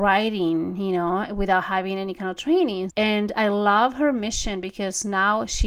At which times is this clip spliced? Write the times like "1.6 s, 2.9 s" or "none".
2.9 s